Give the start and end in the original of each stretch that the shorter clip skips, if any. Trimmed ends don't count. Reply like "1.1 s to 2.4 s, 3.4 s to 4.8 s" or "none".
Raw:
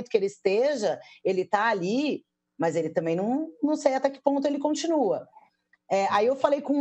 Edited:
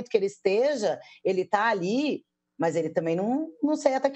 none